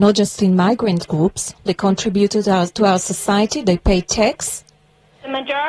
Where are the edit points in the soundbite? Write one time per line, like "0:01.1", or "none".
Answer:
0:01.7